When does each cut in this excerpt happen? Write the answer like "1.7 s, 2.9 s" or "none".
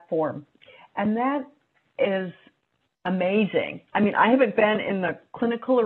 none